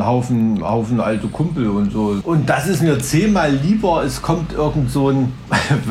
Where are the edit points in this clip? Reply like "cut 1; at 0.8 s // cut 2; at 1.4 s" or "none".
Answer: cut 1; at 2.2 s